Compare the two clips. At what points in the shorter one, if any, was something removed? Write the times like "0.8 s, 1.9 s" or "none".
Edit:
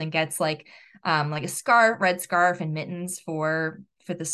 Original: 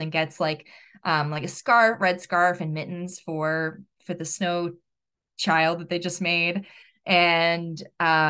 none